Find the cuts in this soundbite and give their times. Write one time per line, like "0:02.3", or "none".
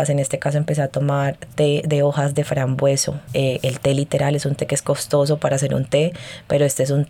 0:03.3